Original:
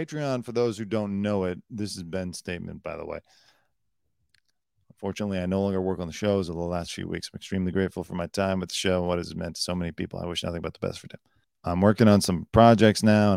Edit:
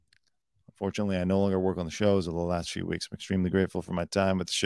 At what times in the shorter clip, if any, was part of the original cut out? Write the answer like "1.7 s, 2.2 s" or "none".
none